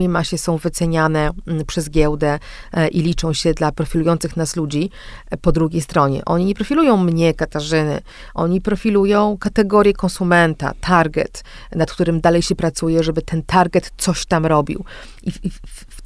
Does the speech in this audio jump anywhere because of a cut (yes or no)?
no